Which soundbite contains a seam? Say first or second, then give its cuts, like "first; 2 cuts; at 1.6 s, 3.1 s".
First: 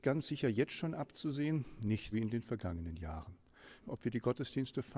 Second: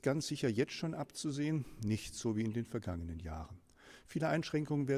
first; 2 cuts; at 2.1 s, 3.8 s